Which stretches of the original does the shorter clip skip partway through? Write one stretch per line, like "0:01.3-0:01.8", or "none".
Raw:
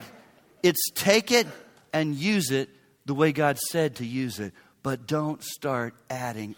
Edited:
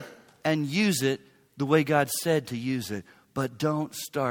none